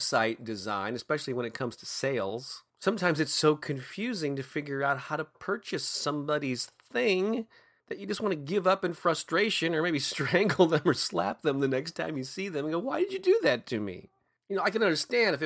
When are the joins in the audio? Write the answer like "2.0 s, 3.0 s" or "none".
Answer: none